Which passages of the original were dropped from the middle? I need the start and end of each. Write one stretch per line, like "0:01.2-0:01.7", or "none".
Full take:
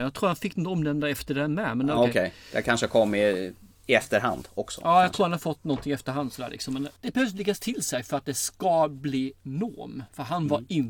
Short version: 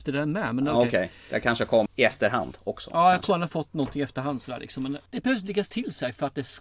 0:03.1-0:03.8